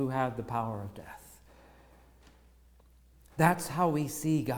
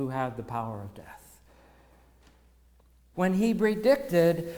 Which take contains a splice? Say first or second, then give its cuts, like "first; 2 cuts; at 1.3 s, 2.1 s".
second; 1 cut; at 3.1 s